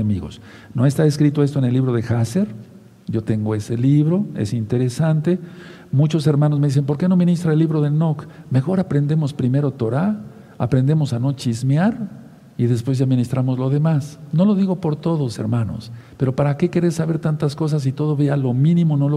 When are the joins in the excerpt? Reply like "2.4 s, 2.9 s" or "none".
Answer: none